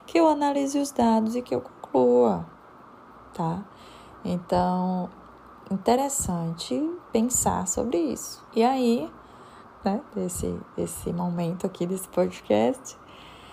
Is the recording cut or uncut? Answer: cut